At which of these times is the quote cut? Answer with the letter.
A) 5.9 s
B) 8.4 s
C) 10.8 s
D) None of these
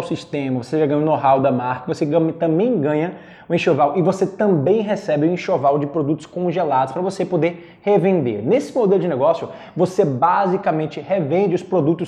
D